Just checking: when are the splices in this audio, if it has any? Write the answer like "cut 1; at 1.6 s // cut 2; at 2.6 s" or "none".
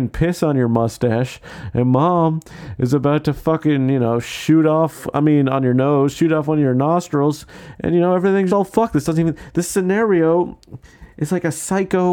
cut 1; at 8.5 s